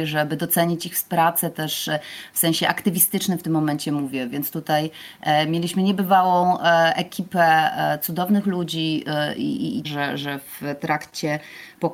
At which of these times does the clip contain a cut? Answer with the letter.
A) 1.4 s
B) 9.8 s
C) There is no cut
B